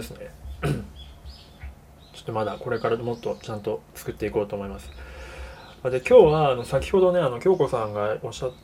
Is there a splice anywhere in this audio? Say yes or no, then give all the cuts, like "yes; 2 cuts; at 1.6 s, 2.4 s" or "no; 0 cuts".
no; 0 cuts